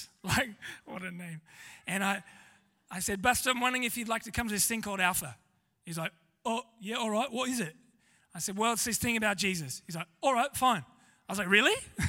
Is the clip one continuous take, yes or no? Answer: yes